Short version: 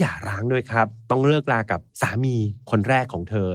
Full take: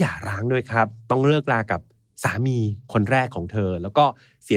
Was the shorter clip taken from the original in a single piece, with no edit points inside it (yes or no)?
no